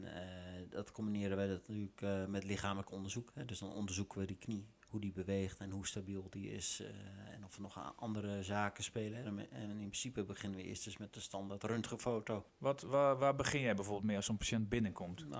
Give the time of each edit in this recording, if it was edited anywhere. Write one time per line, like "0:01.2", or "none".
0:04.8
0:09.2
0:12.5